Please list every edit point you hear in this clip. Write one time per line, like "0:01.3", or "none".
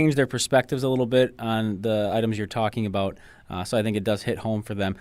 none

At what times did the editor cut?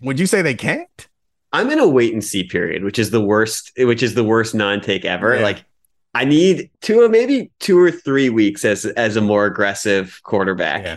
0:06.7

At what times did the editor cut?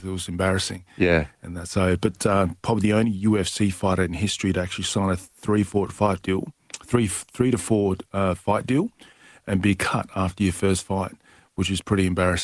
none

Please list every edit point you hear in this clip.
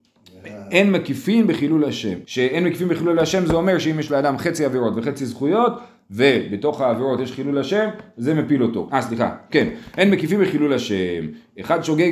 0:02.2
0:08.9

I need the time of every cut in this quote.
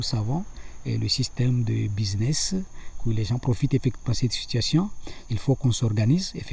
0:03.0
0:05.3

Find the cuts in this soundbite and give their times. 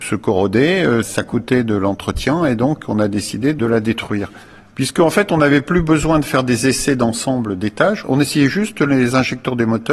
none

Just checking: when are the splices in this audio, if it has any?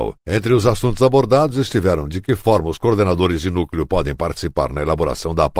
none

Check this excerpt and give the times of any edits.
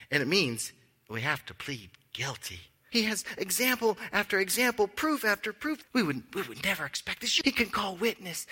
0:02.9
0:05.8
0:07.4

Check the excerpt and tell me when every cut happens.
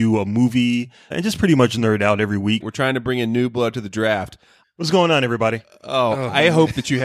0:01.1
0:02.6
0:04.6

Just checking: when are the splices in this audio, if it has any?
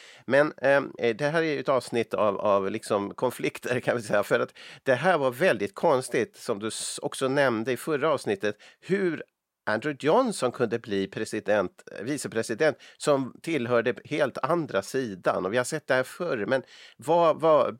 0:01.0

